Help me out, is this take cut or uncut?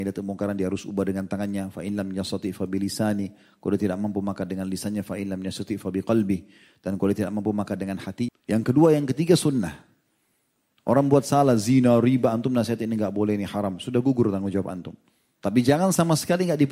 cut